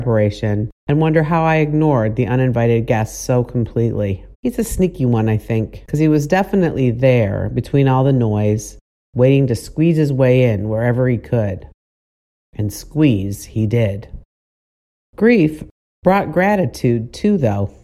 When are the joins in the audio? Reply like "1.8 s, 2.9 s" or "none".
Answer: 4.3 s